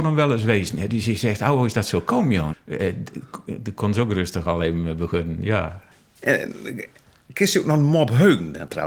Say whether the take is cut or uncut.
cut